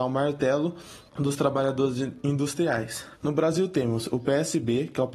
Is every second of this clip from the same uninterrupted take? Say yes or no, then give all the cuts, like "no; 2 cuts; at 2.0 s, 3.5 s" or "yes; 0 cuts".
no; 2 cuts; at 1.1 s, 3.1 s